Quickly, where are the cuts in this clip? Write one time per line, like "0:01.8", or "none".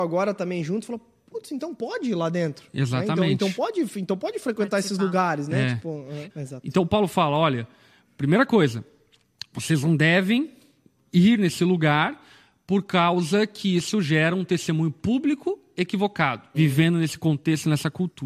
0:06.3
0:16.5